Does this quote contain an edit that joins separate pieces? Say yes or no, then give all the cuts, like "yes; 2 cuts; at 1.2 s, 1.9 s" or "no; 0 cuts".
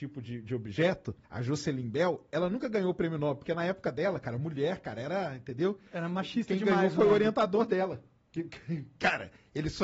yes; 1 cut; at 1.2 s